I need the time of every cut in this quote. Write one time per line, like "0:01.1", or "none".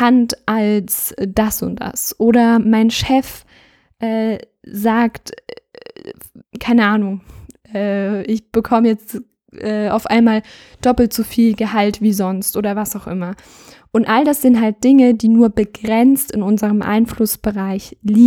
0:06.4